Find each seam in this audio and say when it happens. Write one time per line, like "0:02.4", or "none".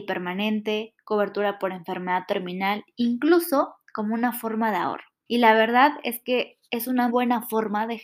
0:05.3
0:07.1

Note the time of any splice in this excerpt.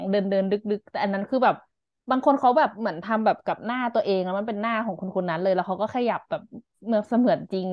none

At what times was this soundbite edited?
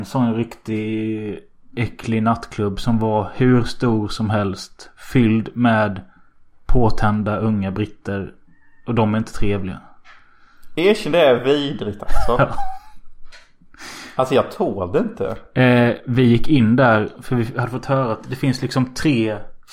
none

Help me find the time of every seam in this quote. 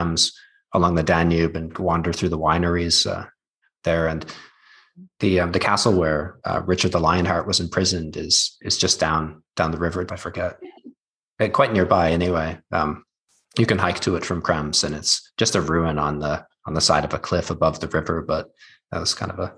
0:10.1

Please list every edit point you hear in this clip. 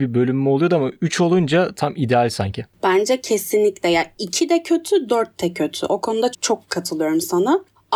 0:06.3

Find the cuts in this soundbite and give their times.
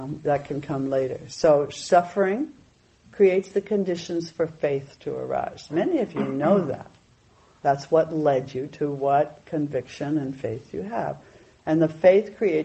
none

